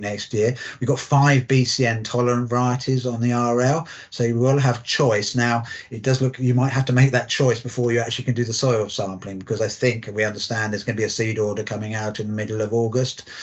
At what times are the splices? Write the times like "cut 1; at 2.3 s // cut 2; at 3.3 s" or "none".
none